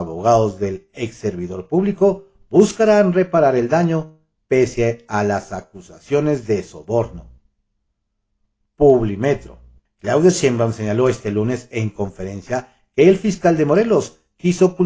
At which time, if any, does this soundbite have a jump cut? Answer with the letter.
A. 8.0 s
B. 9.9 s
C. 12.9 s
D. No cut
B